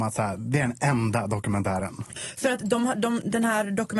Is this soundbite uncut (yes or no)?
yes